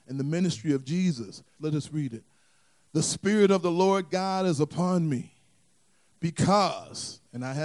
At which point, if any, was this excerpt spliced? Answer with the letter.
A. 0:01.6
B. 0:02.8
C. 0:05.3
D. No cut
A